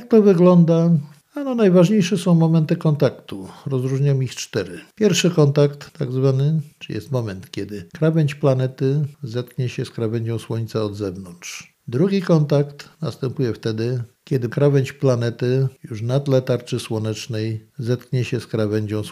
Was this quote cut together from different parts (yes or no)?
no